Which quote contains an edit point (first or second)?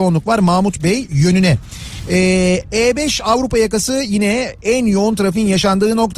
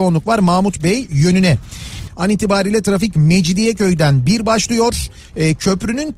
second